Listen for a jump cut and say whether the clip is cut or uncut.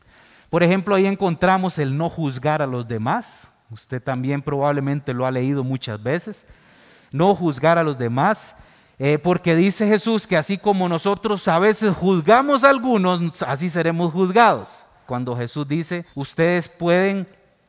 cut